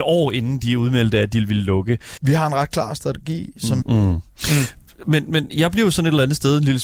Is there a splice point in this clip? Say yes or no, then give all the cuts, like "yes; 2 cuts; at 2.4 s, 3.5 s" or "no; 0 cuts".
yes; 3 cuts; at 2.2 s, 3.8 s, 5.5 s